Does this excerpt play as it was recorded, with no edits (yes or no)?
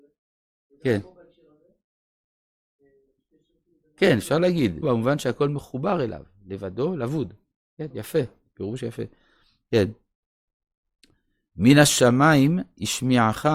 no